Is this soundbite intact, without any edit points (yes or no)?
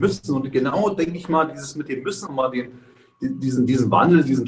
no